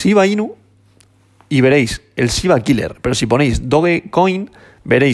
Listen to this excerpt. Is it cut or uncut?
uncut